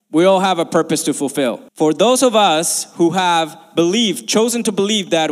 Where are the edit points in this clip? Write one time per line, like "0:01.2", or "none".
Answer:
0:01.7